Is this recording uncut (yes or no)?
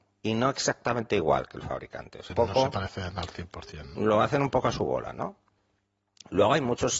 no